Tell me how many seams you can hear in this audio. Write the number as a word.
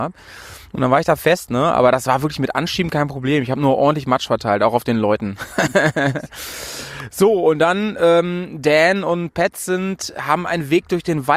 zero